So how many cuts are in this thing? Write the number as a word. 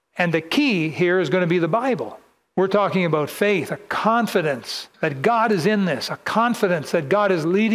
two